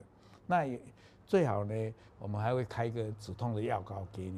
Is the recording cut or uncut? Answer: cut